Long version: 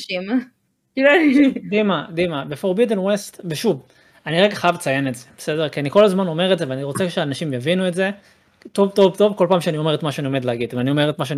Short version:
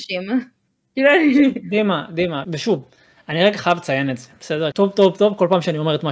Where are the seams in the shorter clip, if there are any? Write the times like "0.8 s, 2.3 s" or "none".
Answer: 2.4 s, 4.7 s